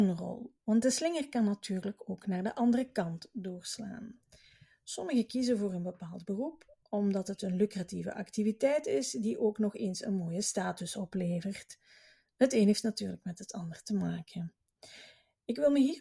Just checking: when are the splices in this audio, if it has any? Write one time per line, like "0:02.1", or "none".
none